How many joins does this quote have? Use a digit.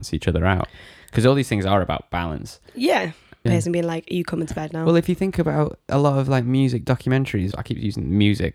2